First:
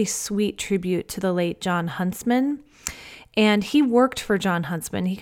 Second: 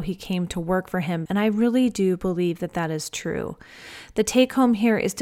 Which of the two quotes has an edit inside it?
second; 1 cut; at 1.3 s

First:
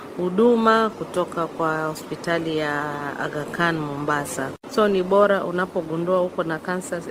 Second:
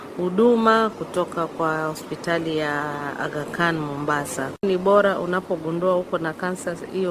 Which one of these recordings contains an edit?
second; 1 cut; at 4.6 s

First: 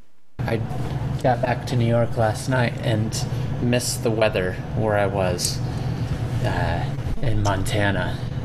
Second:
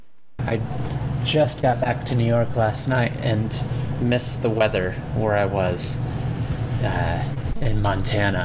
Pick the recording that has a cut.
first; 1 cut; at 1.2 s

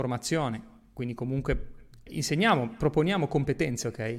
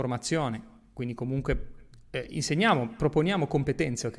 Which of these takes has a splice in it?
first; 1 cut; at 2.1 s

